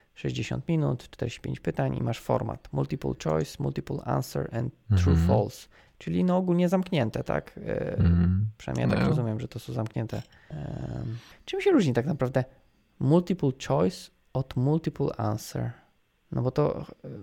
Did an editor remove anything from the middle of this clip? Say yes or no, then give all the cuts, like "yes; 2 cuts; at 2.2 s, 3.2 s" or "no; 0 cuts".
no; 0 cuts